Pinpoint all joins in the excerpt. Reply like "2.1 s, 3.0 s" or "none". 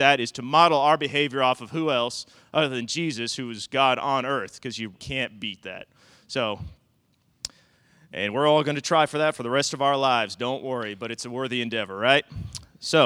4.9 s